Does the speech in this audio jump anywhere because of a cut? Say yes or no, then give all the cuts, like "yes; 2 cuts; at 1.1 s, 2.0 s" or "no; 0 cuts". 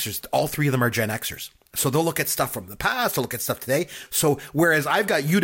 no; 0 cuts